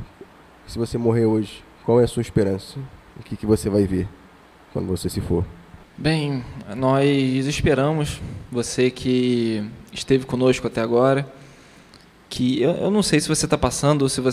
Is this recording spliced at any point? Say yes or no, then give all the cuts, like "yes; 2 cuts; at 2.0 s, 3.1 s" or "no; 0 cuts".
no; 0 cuts